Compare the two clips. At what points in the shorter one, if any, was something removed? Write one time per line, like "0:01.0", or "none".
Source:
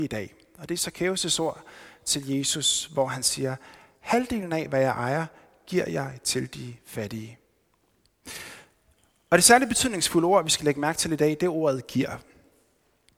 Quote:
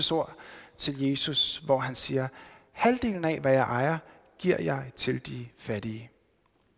none